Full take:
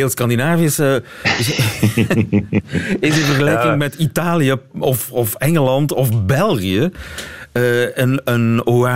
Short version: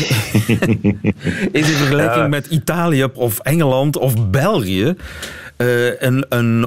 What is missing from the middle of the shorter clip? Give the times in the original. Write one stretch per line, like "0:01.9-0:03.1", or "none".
0:04.6-0:05.1

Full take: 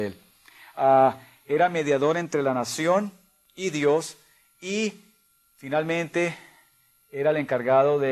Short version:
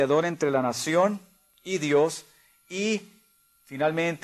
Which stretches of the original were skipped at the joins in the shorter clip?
none

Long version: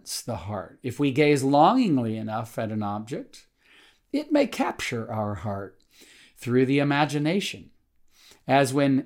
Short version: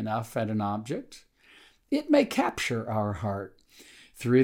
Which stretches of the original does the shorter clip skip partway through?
none

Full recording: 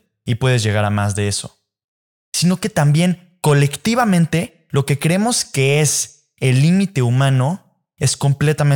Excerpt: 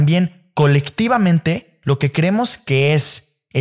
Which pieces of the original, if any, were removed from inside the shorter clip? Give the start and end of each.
none

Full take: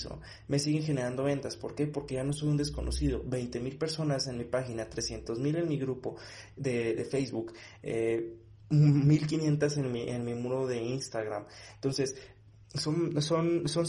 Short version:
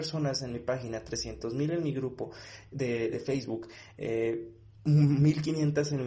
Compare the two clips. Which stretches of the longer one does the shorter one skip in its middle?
none

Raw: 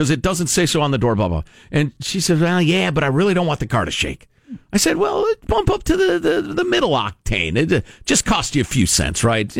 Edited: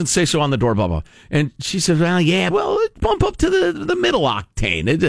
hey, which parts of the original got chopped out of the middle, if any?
0:02.9-0:05.0
0:06.2-0:06.4

